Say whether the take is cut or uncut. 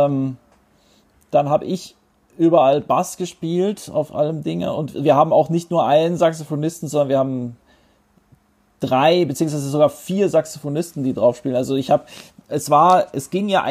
uncut